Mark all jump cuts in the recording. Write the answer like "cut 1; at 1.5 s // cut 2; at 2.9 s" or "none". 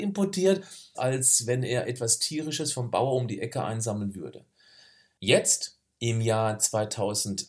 cut 1; at 0.9 s